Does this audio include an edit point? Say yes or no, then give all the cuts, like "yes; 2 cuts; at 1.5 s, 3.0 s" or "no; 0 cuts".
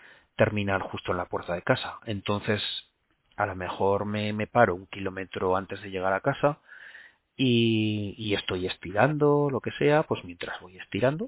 no; 0 cuts